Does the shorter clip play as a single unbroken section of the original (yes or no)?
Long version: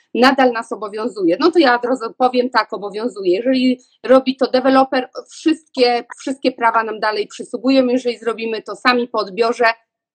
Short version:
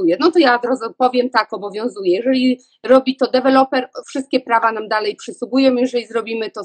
no